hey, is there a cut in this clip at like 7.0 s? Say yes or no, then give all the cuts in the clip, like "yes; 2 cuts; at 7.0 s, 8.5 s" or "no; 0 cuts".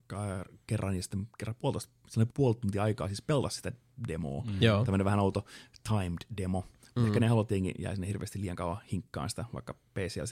no; 1 cut; at 2.3 s